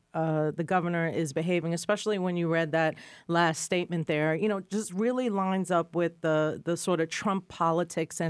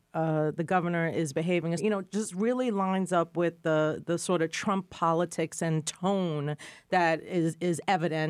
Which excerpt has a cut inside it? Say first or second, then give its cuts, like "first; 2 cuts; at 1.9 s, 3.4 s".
second; 1 cut; at 1.8 s